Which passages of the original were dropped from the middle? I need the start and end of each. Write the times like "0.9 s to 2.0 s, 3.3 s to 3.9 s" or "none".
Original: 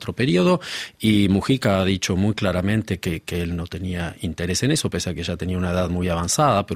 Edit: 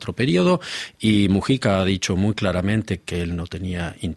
3.0 s to 3.2 s